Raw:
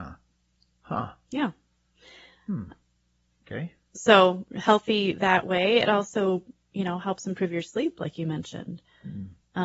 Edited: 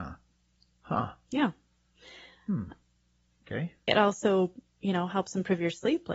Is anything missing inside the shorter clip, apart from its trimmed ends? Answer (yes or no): yes